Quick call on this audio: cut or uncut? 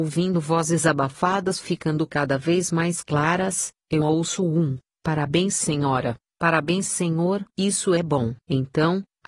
cut